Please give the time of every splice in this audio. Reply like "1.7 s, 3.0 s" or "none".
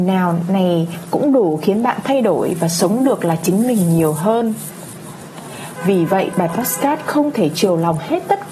none